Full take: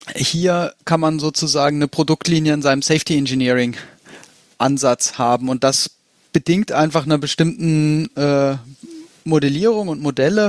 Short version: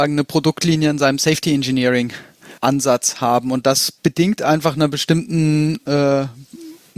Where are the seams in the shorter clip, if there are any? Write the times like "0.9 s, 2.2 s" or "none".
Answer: 2.6 s, 4.0 s

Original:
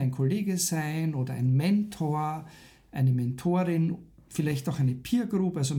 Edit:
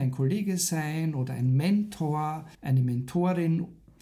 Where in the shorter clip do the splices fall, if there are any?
2.5 s

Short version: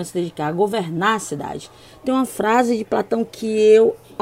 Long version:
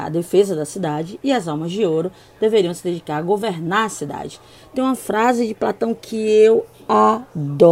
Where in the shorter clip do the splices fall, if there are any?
none

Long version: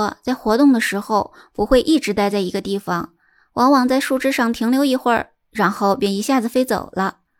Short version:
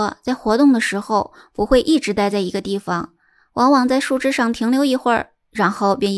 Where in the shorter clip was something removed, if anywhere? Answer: none

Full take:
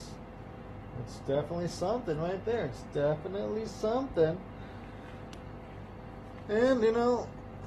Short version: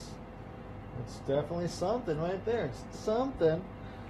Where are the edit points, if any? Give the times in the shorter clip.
2.9 s

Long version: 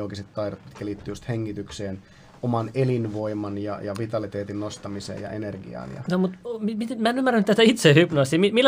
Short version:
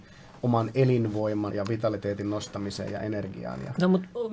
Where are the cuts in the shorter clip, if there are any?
1.5 s

